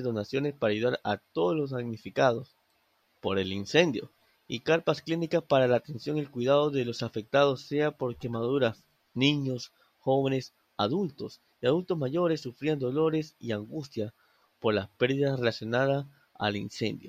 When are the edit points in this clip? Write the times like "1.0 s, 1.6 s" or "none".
none

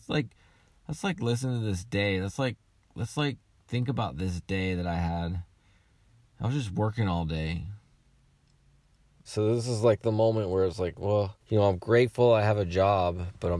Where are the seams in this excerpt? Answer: 9.3 s, 11.4 s

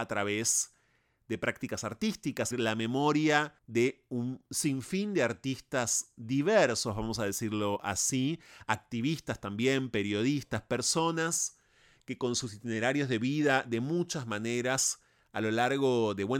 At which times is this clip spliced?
2.5 s, 3.6 s

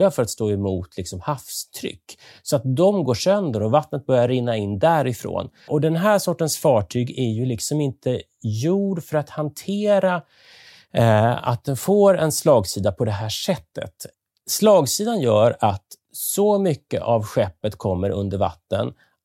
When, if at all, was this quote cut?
5.7 s

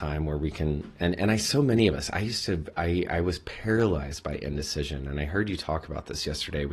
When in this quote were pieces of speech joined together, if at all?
none

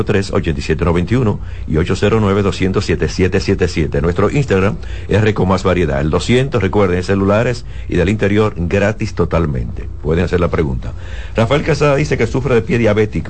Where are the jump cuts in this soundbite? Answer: none

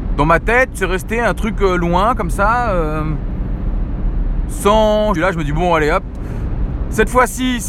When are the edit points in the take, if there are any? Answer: 5.2 s

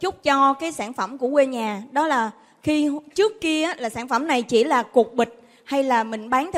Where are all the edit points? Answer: none

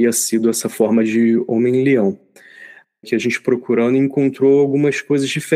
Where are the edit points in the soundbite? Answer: 3.0 s

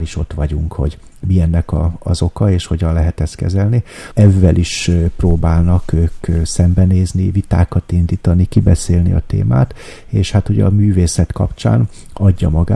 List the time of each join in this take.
4.1 s

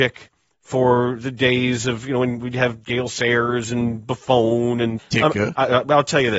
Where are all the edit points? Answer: 5.0 s

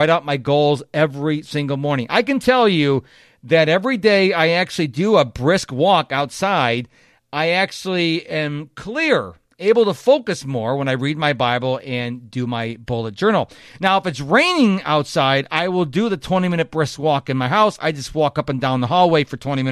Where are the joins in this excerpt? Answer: none

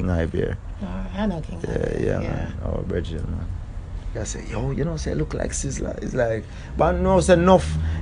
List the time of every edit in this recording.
4.2 s

